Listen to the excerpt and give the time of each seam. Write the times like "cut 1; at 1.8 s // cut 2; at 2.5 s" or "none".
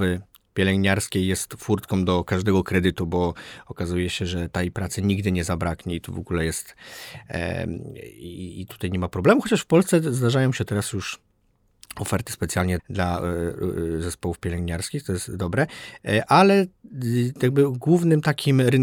cut 1; at 12.8 s